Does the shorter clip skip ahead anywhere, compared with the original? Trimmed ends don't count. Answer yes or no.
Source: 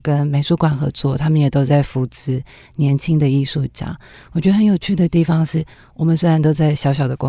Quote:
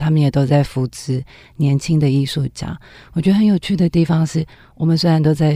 no